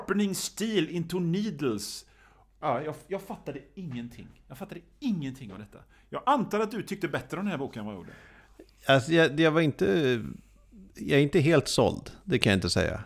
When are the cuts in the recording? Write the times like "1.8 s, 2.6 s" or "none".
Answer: none